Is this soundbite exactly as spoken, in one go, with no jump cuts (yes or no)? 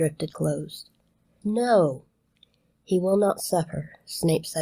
yes